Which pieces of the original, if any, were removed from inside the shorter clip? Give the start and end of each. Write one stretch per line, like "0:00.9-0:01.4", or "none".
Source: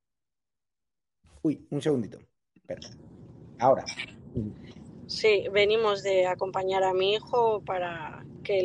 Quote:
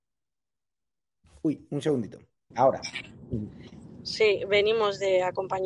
0:02.5-0:03.5